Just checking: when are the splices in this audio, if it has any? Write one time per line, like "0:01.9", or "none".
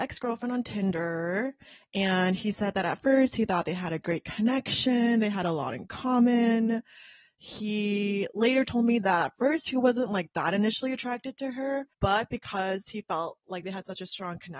0:11.9